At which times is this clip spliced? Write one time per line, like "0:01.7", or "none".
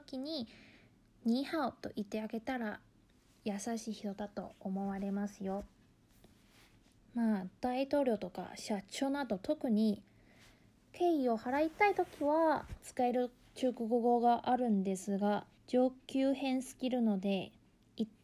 0:07.0
0:15.6